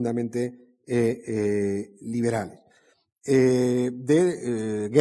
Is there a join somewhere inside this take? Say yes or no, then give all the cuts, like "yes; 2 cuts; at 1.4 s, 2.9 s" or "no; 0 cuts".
no; 0 cuts